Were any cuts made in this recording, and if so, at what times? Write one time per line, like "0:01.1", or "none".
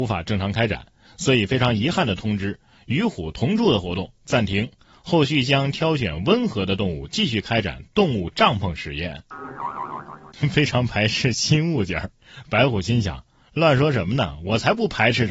none